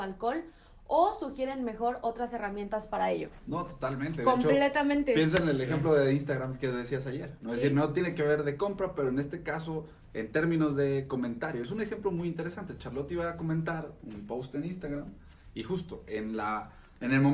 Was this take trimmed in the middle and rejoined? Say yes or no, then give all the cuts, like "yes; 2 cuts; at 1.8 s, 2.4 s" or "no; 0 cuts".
no; 0 cuts